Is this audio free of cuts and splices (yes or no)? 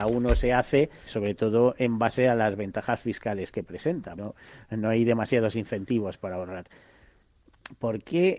no